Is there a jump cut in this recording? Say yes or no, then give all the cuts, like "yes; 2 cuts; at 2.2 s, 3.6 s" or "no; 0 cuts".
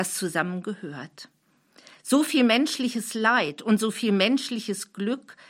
no; 0 cuts